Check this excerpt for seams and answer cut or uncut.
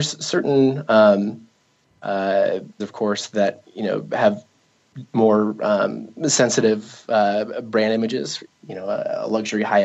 cut